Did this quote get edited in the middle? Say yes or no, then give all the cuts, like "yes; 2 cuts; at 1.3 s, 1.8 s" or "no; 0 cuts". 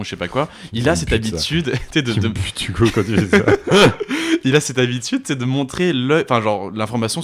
no; 0 cuts